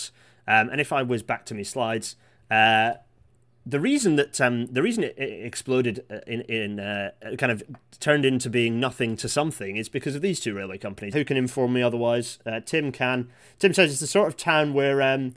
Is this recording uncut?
no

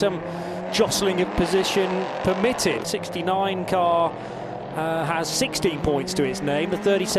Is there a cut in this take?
yes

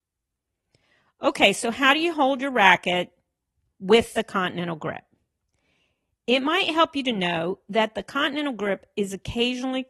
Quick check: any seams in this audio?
no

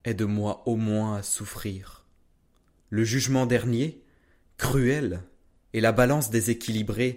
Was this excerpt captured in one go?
no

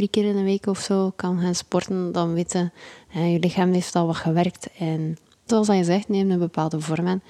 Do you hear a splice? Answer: yes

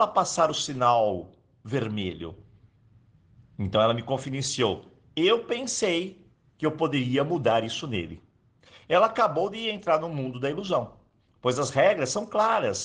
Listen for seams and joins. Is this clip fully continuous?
yes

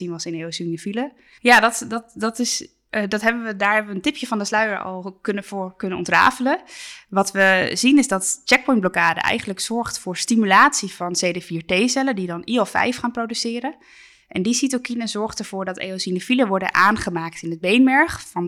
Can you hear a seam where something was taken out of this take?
yes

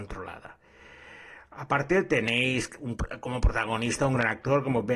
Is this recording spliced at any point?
no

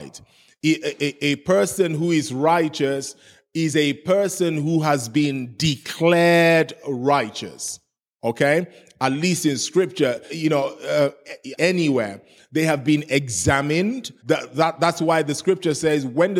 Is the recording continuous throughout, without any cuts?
no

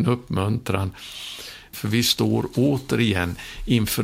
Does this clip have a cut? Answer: yes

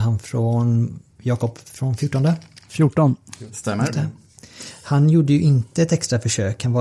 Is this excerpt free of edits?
yes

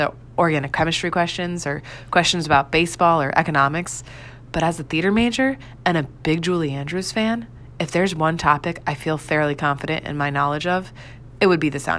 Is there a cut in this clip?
no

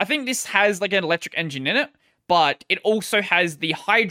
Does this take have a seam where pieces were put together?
no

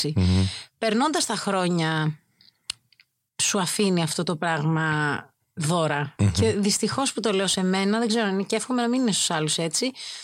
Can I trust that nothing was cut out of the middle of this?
yes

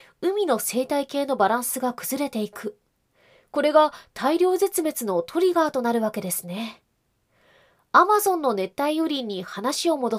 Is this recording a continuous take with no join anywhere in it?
yes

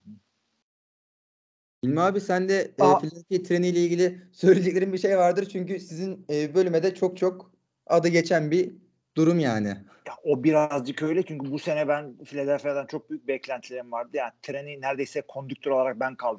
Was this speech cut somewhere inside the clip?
no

